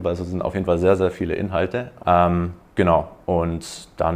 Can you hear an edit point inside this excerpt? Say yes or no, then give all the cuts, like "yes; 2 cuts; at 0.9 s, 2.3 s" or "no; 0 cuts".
yes; 1 cut; at 2.0 s